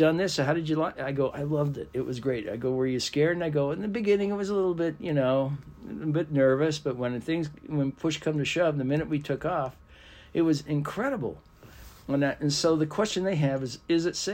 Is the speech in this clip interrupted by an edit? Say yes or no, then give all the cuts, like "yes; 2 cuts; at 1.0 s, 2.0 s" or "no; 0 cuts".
no; 0 cuts